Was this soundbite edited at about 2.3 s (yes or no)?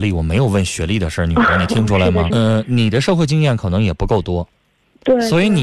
yes